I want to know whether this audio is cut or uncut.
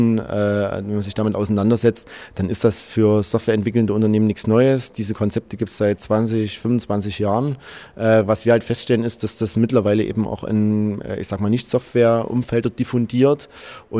uncut